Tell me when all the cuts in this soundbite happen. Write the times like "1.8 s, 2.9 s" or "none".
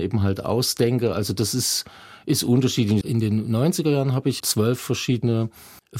3.0 s, 4.4 s